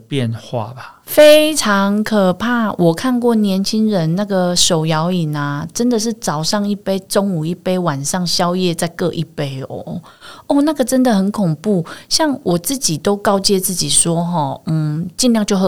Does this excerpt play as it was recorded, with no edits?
yes; 0 cuts

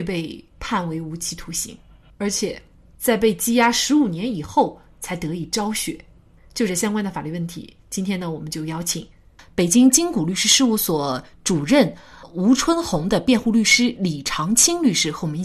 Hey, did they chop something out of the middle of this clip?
no; 0 cuts

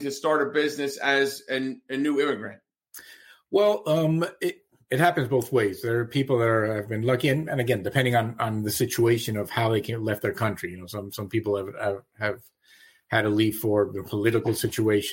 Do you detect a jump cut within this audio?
no; 0 cuts

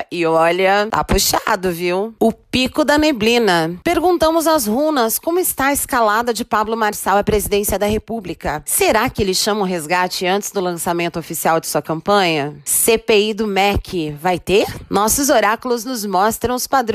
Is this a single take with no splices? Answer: yes; 0 cuts

